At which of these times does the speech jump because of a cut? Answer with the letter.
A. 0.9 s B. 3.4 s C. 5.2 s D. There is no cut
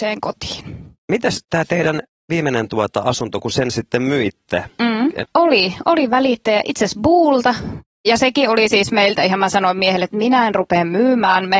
C